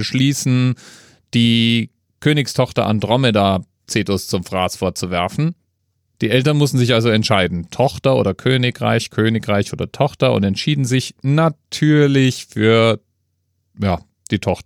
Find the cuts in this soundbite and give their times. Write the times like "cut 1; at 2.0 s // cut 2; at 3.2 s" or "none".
none